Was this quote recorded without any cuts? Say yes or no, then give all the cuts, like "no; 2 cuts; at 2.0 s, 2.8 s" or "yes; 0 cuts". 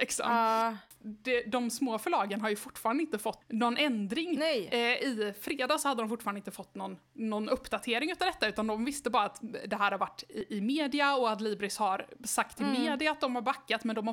yes; 0 cuts